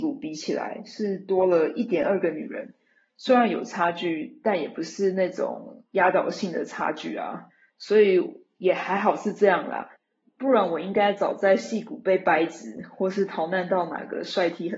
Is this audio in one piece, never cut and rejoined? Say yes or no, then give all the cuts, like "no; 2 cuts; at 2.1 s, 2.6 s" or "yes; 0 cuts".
yes; 0 cuts